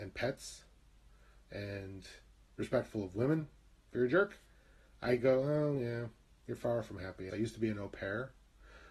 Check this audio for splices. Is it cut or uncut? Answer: cut